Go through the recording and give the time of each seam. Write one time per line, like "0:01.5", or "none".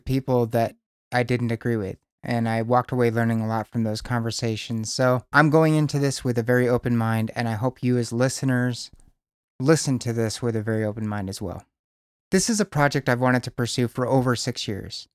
none